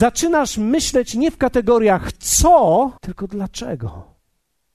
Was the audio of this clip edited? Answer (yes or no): yes